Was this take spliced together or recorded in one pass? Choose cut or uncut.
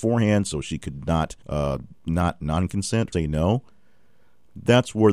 cut